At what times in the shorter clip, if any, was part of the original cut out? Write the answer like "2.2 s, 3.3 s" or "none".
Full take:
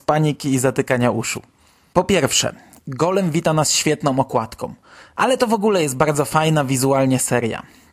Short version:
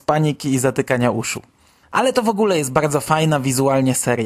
1.8 s